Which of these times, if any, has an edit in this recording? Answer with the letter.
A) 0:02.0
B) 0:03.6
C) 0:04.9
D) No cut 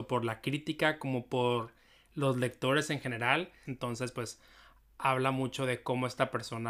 B